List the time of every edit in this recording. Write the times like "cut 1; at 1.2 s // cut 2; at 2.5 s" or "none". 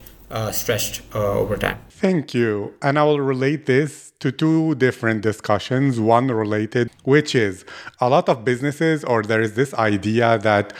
cut 1; at 6.9 s